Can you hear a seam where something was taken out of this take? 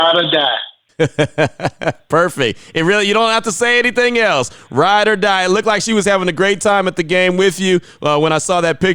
no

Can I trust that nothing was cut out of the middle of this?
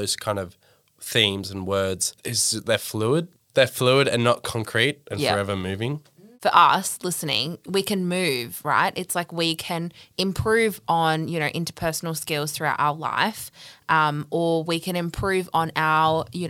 no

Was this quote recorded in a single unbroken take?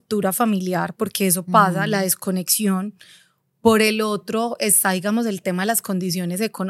yes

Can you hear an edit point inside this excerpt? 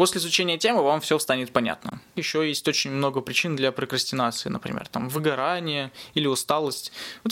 yes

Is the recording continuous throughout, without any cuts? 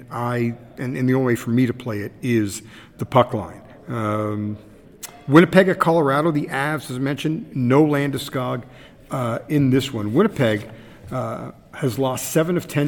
yes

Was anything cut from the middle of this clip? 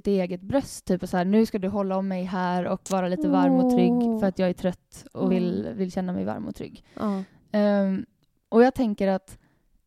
no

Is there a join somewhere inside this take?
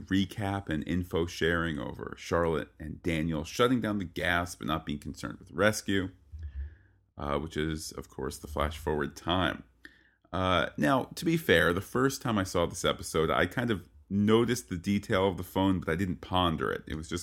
yes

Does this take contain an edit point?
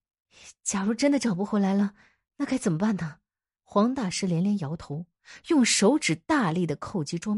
yes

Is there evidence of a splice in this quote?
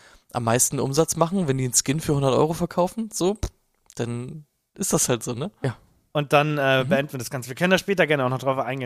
yes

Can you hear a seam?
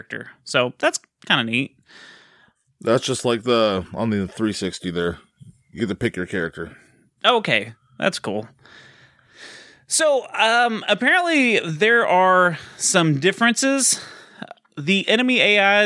no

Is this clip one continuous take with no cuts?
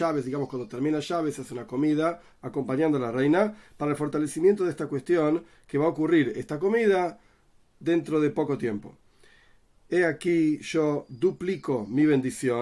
yes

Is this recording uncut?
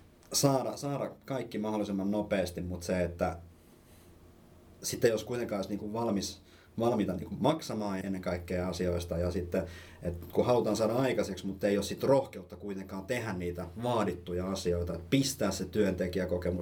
no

